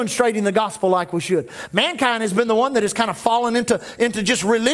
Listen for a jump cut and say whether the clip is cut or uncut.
uncut